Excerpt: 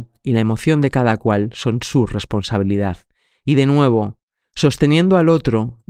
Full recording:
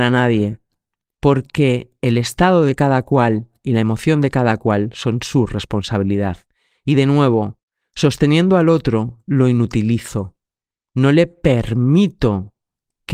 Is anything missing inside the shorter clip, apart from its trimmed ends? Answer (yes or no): no